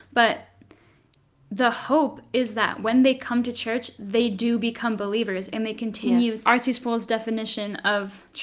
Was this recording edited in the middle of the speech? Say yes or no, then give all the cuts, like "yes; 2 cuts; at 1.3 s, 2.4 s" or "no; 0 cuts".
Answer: yes; 1 cut; at 6.4 s